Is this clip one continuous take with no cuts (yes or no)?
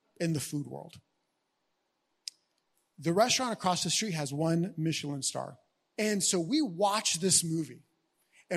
no